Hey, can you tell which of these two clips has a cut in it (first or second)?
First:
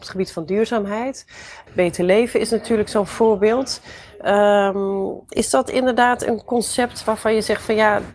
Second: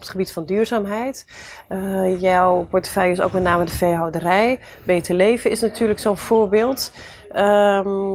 first